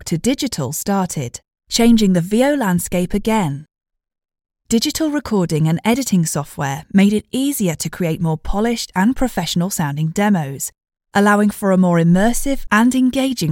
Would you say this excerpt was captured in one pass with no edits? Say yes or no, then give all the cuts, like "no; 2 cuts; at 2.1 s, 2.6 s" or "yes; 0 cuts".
no; 1 cut; at 11.0 s